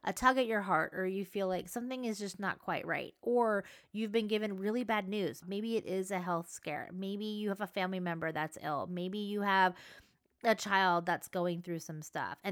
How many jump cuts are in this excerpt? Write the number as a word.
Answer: one